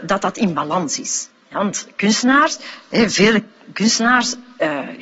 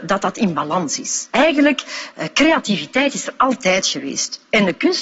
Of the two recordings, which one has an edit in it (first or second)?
first